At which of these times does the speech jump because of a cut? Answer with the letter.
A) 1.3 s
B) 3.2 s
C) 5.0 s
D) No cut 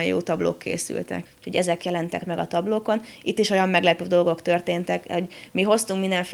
A